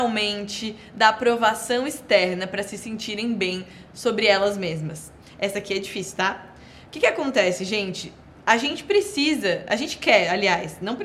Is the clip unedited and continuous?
yes; 0 cuts

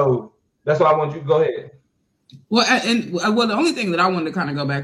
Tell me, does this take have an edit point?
no; 0 cuts

